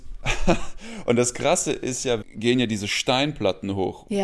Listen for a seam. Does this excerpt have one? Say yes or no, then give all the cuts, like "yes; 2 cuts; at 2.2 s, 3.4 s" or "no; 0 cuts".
yes; 1 cut; at 2.2 s